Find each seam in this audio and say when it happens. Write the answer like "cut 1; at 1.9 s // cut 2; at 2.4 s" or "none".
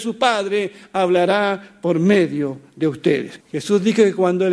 cut 1; at 3.4 s